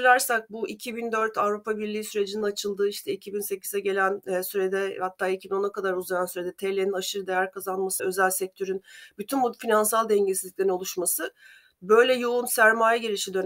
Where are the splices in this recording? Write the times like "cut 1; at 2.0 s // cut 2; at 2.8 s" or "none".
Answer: cut 1; at 8.0 s